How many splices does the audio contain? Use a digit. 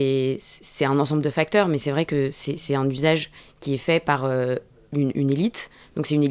0